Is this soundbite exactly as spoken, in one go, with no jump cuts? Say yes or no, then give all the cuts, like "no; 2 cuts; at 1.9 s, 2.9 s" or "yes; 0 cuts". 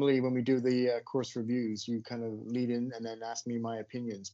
yes; 0 cuts